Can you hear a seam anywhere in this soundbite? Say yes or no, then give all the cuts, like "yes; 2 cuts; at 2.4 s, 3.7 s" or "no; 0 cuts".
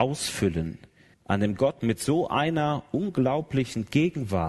yes; 1 cut; at 1.1 s